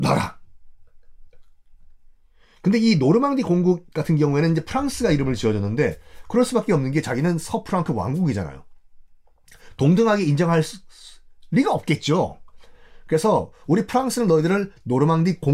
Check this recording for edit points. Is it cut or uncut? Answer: uncut